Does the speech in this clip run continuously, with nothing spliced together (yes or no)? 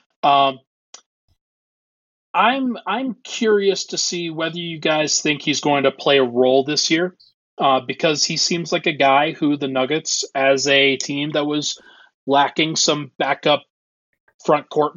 yes